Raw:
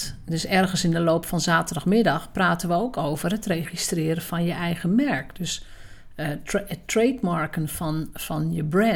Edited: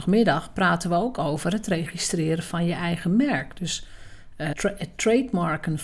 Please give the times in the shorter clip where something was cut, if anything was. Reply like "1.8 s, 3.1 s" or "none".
4.5 s